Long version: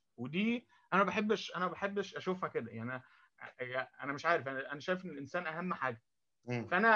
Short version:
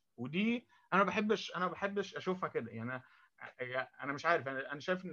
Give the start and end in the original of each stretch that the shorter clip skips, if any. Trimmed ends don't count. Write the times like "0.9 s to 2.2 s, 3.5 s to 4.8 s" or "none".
none